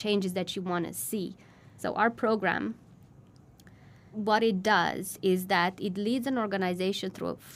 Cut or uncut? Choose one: cut